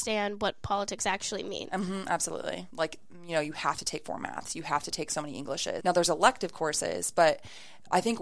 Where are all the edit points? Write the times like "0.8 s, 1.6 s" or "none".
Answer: 2.7 s, 5.8 s